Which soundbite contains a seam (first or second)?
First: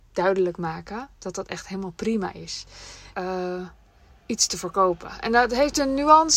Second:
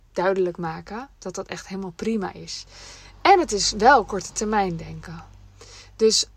first